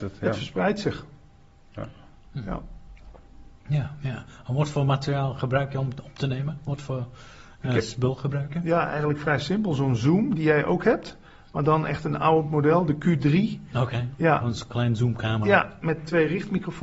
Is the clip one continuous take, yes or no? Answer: yes